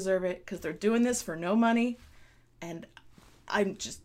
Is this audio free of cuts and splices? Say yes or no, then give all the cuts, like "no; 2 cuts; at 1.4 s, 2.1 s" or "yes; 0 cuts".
yes; 0 cuts